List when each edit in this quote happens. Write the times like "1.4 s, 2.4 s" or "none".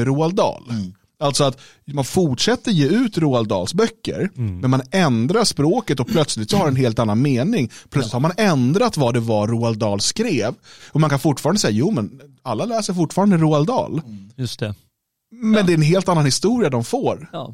none